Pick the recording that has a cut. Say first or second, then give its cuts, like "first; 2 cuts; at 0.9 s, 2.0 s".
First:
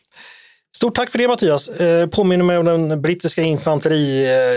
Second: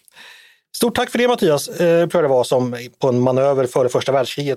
second; 1 cut; at 2.1 s